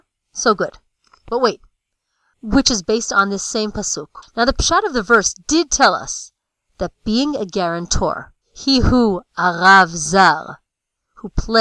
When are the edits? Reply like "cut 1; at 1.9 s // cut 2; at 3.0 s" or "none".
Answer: cut 1; at 2.3 s // cut 2; at 4.2 s // cut 3; at 8.4 s

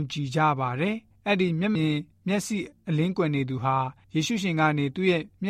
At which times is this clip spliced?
cut 1; at 1.7 s

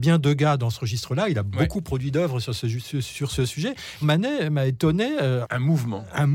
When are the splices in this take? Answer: cut 1; at 4.0 s // cut 2; at 5.4 s

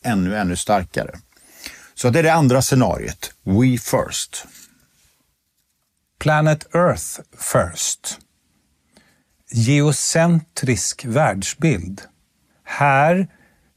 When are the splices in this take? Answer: cut 1; at 12.5 s

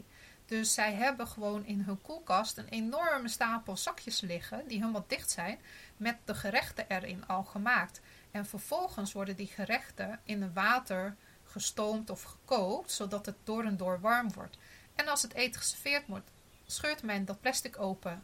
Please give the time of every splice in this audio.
none

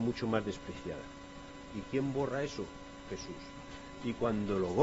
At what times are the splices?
cut 1; at 1.7 s

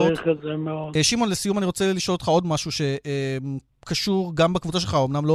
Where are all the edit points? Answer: cut 1; at 1.0 s

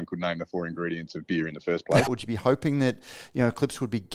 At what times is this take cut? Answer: cut 1; at 2.1 s

